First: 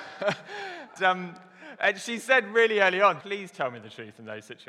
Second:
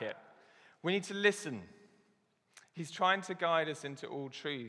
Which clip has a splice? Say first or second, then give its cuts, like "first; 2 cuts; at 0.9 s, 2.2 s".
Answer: first; 2 cuts; at 1.0 s, 3.2 s